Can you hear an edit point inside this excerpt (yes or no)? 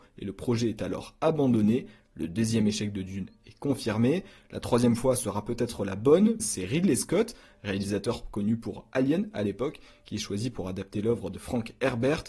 yes